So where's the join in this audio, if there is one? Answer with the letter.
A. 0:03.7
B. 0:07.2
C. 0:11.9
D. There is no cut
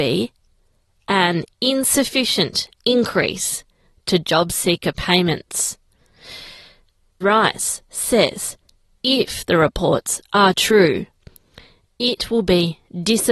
B